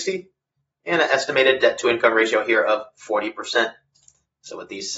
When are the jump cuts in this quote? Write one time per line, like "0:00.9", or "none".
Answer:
none